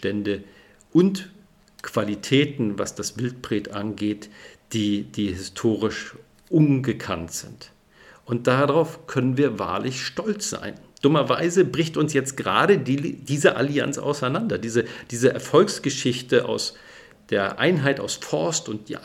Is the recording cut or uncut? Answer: uncut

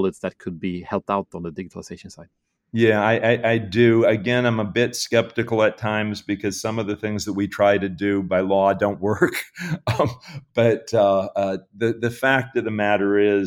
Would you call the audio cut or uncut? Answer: uncut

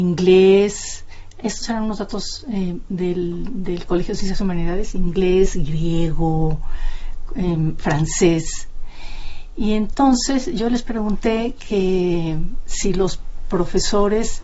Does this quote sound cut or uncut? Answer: uncut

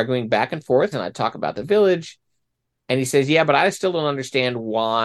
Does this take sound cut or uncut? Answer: cut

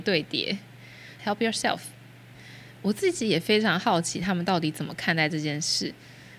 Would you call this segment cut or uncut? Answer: cut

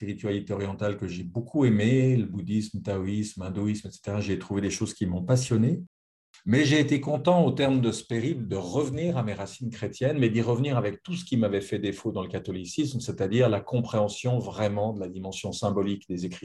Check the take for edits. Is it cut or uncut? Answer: uncut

